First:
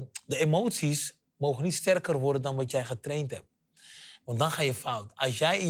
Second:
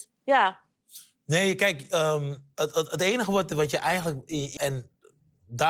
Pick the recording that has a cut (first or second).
second